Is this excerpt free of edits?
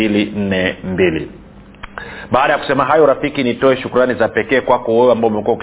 yes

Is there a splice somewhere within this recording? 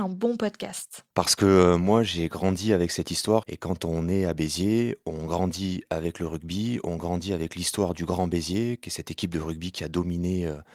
yes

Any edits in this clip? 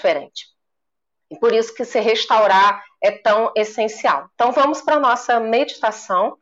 no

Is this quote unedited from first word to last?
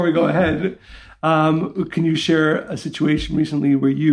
yes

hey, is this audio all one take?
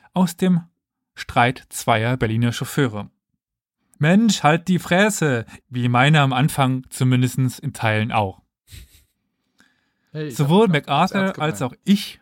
no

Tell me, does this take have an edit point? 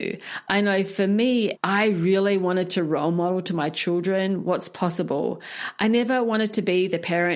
yes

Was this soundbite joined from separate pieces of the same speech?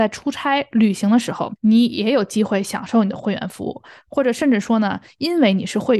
yes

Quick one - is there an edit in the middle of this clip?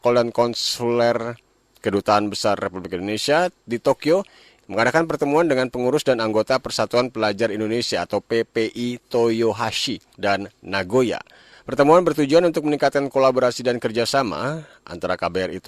yes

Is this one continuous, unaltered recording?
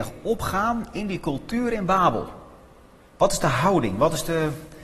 no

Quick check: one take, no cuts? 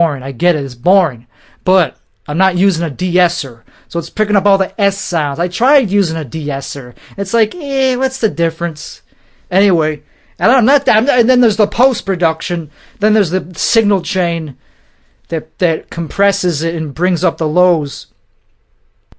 no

